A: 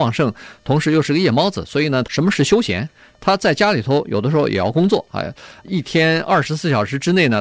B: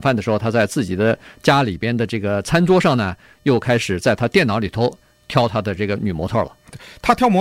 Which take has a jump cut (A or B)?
A